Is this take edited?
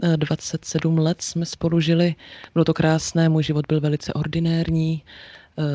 no; 0 cuts

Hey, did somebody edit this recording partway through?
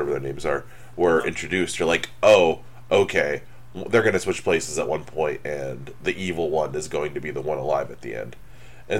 no; 0 cuts

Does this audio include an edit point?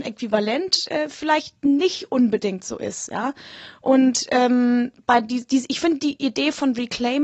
no; 0 cuts

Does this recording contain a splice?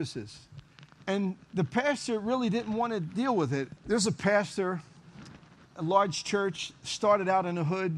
yes; 2 cuts; at 1.0 s, 3.8 s

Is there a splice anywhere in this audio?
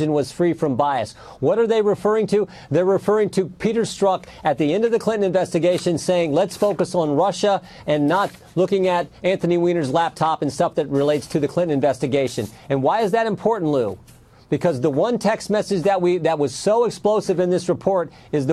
no; 0 cuts

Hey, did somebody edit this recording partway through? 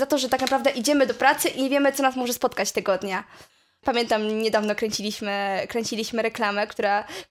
yes; 1 cut; at 3.8 s

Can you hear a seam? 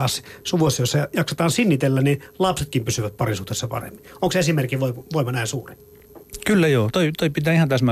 no; 0 cuts

